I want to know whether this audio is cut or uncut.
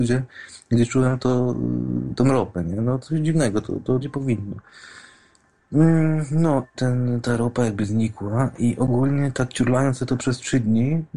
cut